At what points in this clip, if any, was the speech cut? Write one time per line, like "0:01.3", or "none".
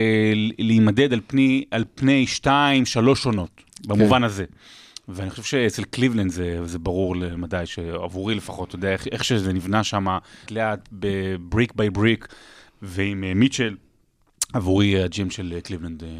0:10.5